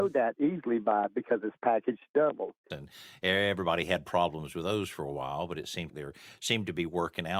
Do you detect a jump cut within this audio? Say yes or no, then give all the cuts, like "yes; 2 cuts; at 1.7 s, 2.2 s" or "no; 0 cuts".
yes; 2 cuts; at 2.7 s, 5.9 s